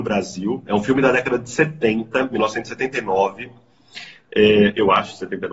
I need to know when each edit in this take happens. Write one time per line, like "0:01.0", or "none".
none

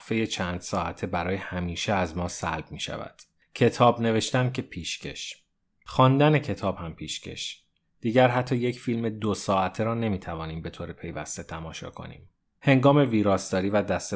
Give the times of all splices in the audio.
0:12.6

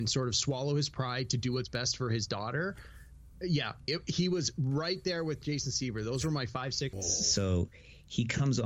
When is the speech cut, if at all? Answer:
0:03.9
0:06.9

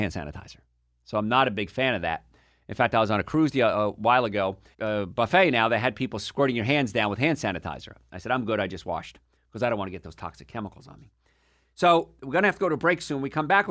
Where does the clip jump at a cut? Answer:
0:04.7

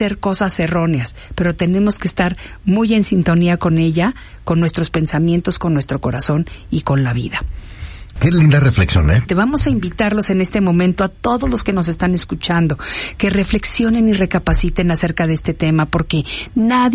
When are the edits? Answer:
0:08.2
0:09.3

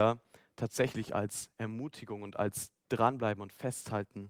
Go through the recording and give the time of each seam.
none

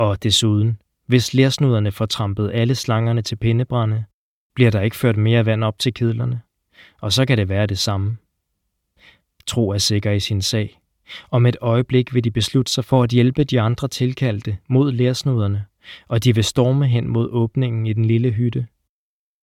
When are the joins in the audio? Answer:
none

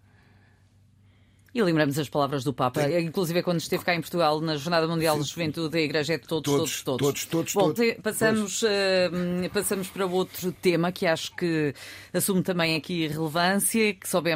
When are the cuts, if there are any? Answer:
0:07.8

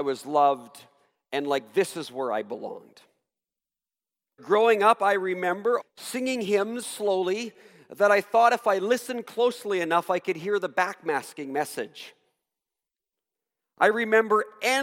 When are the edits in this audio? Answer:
0:04.4
0:05.8
0:06.8

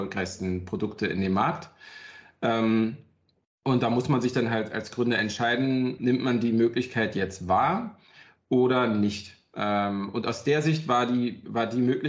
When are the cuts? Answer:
0:06.0

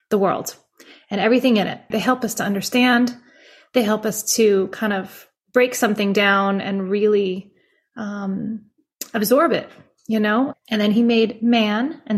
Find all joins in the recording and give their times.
0:01.9
0:10.5

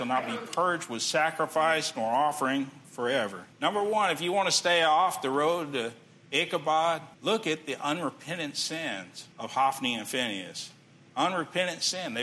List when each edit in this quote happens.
0:03.5
0:07.1
0:09.3

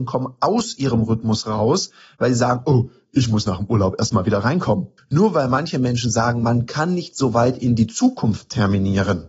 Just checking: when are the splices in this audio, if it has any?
0:05.0

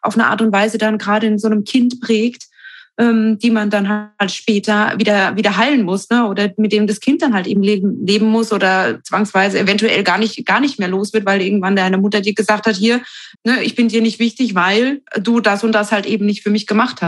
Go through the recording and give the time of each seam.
0:13.3
0:15.1

